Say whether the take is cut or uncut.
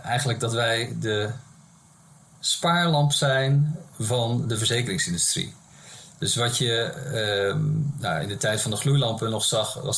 uncut